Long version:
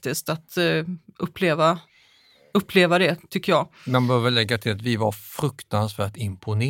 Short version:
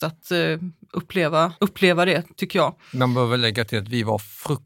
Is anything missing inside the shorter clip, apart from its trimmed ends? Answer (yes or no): yes